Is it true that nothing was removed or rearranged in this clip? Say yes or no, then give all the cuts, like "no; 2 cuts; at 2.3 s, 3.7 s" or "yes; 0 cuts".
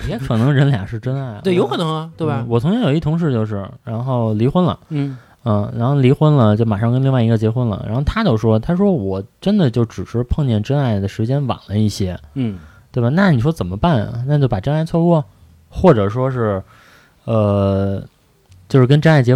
yes; 0 cuts